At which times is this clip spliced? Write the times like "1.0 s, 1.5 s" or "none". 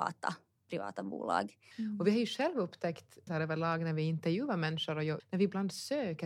1.7 s, 3.3 s, 5.2 s